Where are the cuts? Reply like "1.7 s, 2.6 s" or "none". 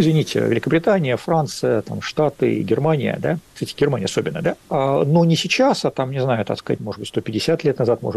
4.6 s, 6.8 s